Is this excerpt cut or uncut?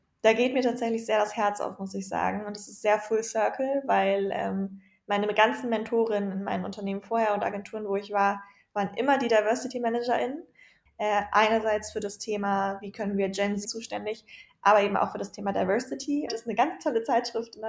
cut